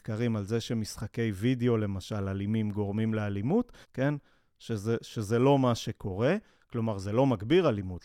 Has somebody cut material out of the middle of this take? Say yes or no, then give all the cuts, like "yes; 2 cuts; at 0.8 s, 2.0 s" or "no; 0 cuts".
yes; 1 cut; at 3.8 s